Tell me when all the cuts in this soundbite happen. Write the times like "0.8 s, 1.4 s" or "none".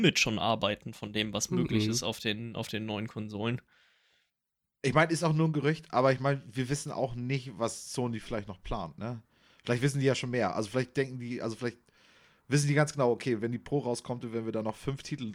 none